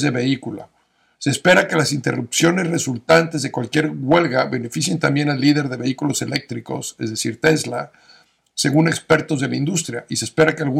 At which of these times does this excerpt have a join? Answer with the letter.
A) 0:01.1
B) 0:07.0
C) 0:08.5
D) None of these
A